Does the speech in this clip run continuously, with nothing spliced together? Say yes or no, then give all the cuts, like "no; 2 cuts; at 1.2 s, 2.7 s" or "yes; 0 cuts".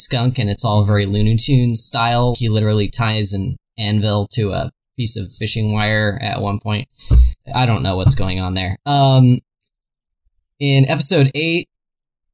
no; 2 cuts; at 2.3 s, 7.4 s